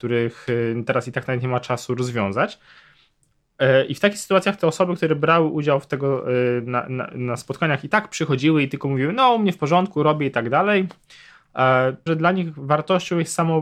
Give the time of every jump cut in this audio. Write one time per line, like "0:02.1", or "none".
0:12.1